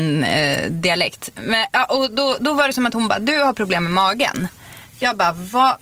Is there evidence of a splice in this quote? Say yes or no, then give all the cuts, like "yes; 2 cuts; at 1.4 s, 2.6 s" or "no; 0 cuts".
no; 0 cuts